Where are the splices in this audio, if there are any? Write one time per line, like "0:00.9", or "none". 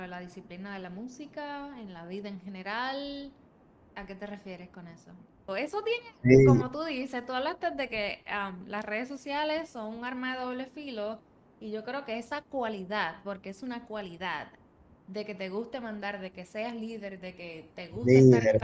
0:05.5